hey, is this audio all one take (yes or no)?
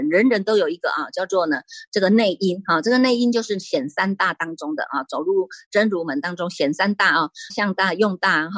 no